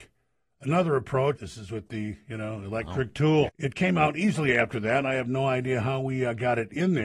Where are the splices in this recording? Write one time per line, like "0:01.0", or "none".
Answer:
0:01.4
0:03.5